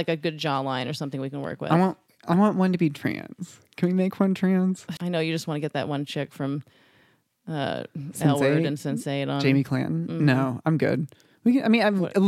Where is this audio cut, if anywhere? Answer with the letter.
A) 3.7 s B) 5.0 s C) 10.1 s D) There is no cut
B